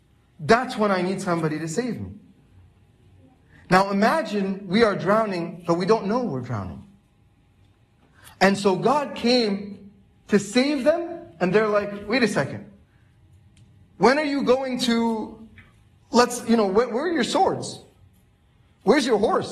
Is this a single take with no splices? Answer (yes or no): yes